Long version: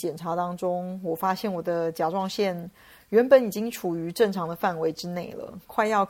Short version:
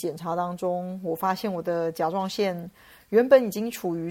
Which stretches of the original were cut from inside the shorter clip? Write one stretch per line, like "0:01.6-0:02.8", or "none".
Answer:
none